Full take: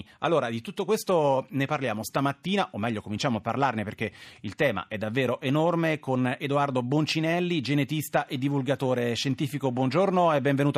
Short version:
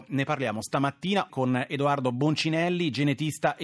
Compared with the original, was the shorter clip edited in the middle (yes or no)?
yes